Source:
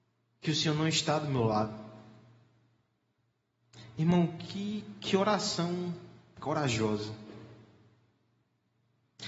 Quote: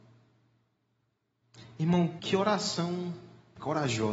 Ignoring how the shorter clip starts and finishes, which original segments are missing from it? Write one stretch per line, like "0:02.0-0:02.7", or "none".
0:04.4-0:05.0